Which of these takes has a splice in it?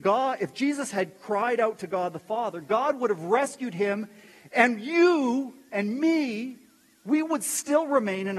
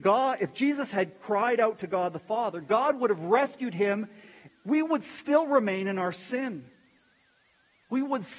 second; 1 cut; at 4.5 s

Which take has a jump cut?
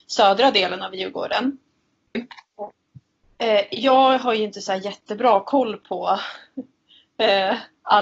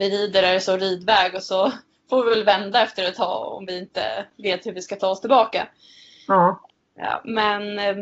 first; 1 cut; at 2.1 s

